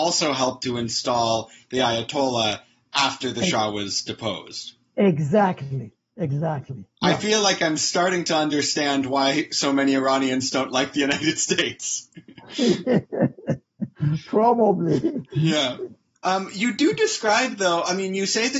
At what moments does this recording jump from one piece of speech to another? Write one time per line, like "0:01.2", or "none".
0:16.2